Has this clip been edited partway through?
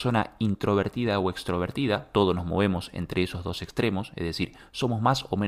no; 0 cuts

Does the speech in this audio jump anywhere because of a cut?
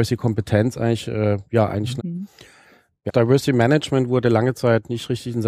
yes; 2 cuts; at 2.0 s, 3.1 s

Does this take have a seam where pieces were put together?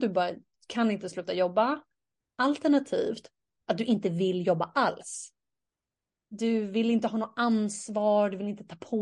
no; 0 cuts

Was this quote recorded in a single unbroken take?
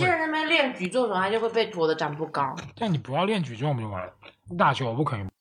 yes; 0 cuts

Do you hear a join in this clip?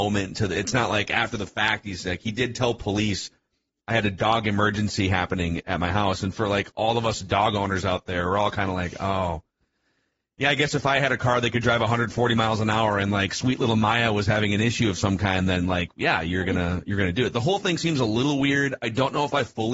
no; 0 cuts

